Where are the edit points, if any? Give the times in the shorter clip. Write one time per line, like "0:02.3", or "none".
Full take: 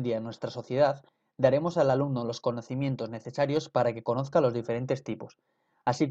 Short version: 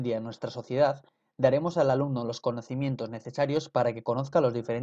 none